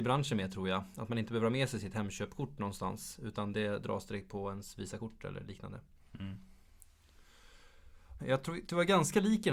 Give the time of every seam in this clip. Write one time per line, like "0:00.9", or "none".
0:08.2